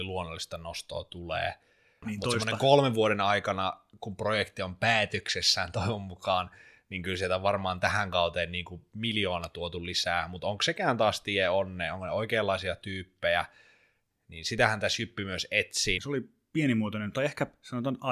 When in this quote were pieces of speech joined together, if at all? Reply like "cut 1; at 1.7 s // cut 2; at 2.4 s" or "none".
cut 1; at 2.0 s // cut 2; at 16.0 s